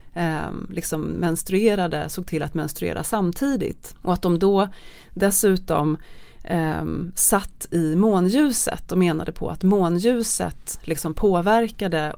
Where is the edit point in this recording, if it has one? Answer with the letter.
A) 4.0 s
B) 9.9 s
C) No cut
A